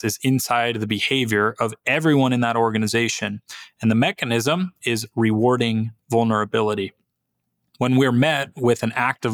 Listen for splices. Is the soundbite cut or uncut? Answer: uncut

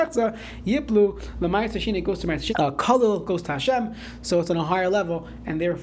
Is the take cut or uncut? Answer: cut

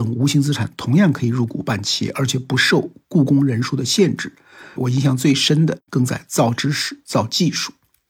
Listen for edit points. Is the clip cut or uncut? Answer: cut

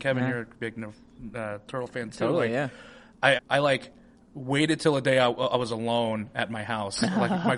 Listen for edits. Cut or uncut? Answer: cut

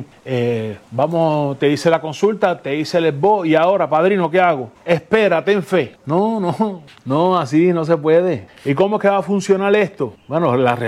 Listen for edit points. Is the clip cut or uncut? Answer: uncut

